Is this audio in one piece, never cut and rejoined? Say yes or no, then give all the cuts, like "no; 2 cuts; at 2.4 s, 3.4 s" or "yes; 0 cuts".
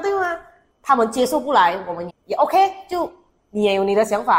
no; 1 cut; at 2.1 s